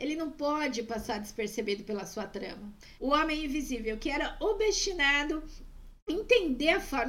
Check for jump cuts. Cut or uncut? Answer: cut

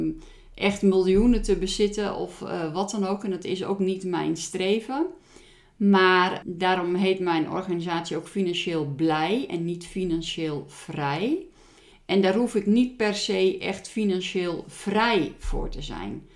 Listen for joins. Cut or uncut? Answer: cut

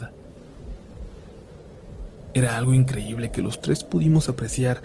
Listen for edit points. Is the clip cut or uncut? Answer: cut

